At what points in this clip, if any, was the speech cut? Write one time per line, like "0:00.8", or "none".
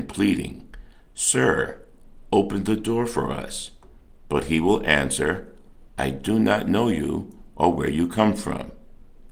none

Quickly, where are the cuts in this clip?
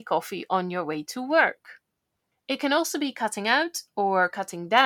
0:02.3

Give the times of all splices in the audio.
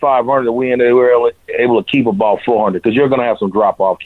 none

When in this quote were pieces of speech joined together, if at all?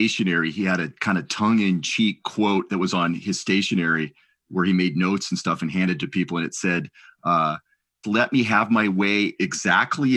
0:08.0

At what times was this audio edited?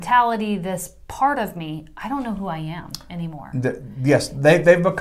none

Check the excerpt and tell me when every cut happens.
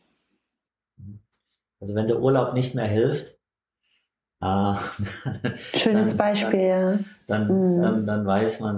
none

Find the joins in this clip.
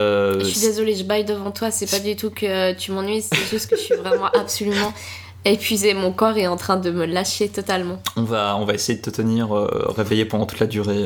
none

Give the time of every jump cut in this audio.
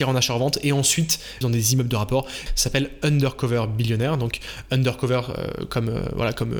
0:01.4
0:02.5

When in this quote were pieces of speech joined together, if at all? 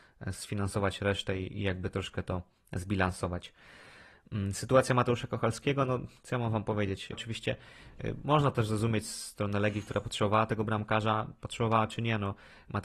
0:07.1

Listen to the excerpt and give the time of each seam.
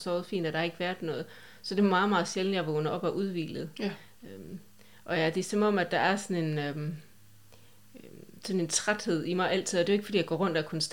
none

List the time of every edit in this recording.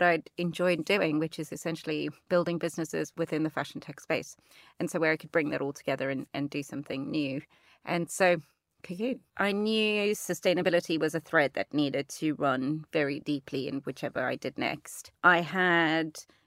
0:09.3

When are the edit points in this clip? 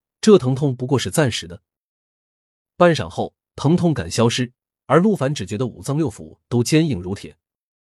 none

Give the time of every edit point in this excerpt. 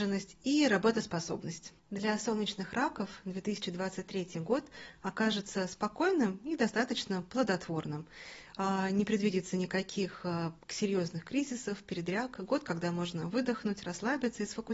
0:01.8

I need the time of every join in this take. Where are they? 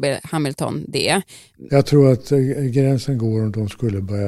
0:01.7

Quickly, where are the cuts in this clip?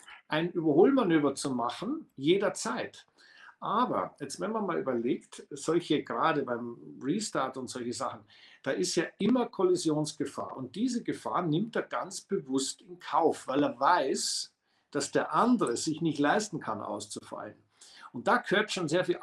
none

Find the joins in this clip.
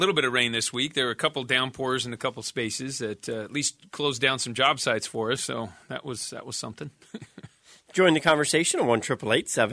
0:05.4

